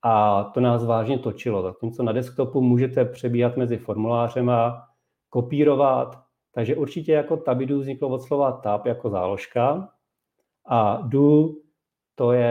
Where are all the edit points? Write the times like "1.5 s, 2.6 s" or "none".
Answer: none